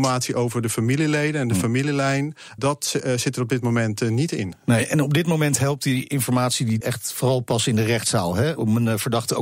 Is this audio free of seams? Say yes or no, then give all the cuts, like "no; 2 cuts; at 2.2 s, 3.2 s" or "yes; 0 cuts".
no; 2 cuts; at 2.6 s, 6.8 s